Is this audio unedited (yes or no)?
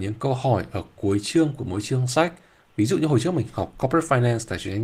yes